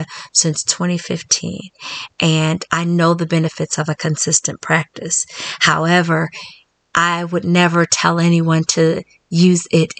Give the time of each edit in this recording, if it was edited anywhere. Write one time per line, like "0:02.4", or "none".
0:02.7